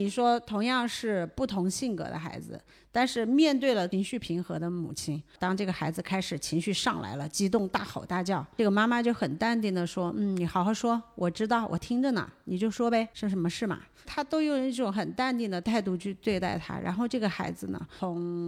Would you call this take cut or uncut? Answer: uncut